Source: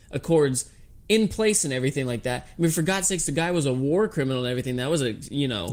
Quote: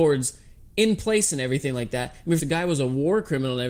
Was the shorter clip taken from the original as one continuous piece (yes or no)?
no